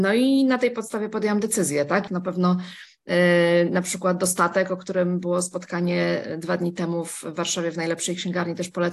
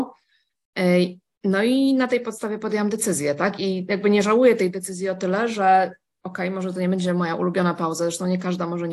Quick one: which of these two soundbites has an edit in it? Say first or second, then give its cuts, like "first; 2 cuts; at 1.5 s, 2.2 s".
first; 1 cut; at 2.1 s